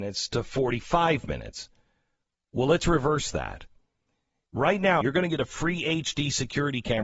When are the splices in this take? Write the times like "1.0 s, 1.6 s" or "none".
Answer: 5.0 s